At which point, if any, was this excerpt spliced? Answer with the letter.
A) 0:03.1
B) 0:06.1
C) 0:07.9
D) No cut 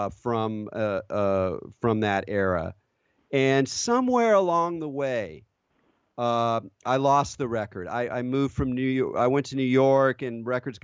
D